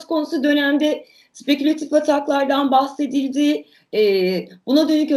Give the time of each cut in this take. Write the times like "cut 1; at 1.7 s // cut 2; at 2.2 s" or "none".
none